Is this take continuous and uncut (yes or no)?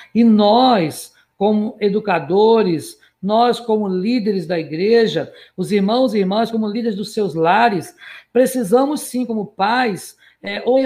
yes